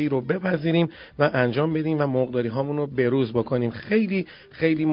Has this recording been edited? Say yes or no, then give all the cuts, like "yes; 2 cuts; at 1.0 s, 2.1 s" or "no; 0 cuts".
no; 0 cuts